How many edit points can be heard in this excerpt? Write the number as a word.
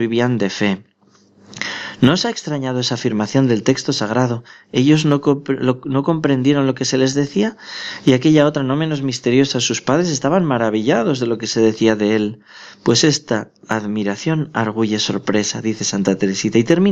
zero